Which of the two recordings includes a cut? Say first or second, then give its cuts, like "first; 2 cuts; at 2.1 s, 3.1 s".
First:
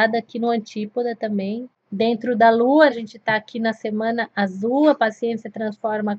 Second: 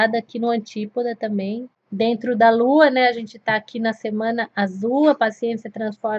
first; 1 cut; at 2.9 s